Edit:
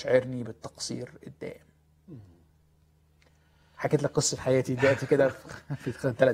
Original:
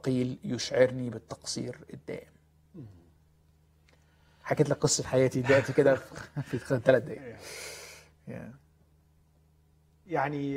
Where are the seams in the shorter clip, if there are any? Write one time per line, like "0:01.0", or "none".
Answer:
none